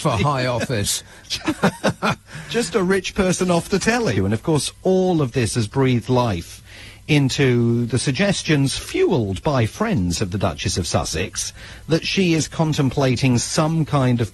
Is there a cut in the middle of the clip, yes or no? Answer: yes